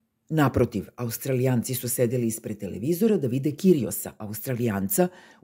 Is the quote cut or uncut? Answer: uncut